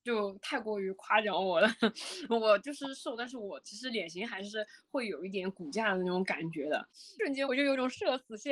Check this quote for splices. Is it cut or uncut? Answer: cut